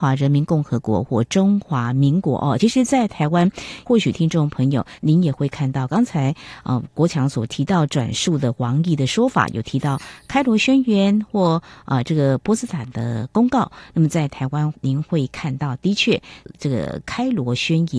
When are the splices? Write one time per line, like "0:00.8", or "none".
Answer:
none